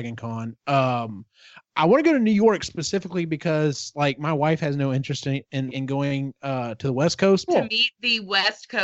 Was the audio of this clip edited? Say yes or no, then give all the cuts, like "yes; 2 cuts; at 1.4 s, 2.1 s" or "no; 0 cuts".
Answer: yes; 2 cuts; at 5.7 s, 7.5 s